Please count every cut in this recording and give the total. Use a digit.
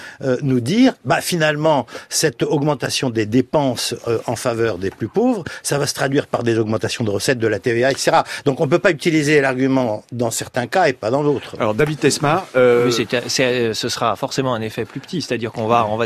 0